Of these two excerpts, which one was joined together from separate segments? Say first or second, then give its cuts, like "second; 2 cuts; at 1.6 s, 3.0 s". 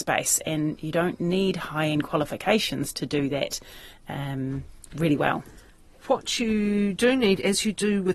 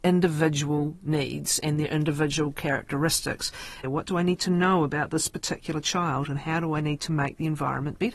second; 1 cut; at 3.8 s